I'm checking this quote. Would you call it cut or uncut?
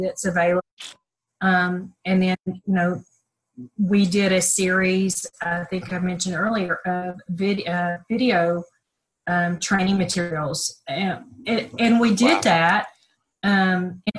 uncut